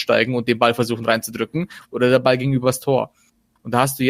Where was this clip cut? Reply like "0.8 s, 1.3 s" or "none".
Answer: 1.8 s